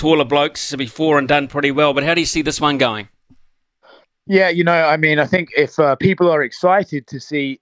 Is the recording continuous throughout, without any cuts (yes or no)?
yes